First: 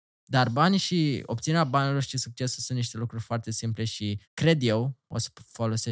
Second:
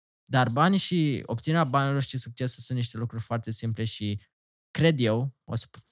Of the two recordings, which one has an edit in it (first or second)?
first